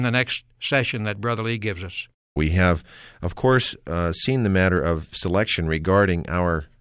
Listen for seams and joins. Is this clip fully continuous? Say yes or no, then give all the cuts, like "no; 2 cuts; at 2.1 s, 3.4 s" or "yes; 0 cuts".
no; 1 cut; at 2.4 s